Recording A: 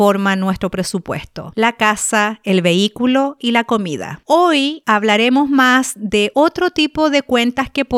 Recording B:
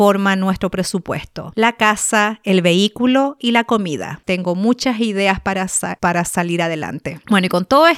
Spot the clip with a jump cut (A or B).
B